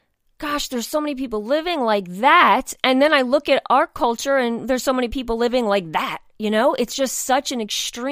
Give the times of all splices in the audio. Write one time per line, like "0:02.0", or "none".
none